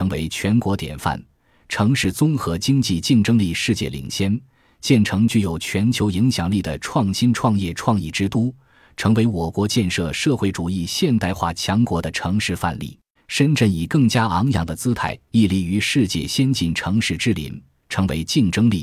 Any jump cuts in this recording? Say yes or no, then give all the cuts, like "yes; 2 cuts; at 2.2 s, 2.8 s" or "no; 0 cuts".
yes; 1 cut; at 13.2 s